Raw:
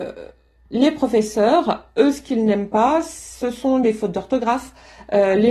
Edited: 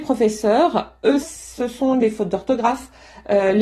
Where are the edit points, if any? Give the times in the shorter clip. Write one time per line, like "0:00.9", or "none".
0:01.2